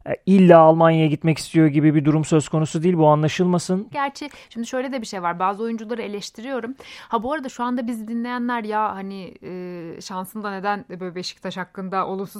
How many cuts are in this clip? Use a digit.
1